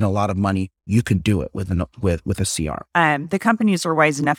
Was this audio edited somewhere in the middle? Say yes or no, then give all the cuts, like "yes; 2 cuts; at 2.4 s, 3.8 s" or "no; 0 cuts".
yes; 1 cut; at 2.9 s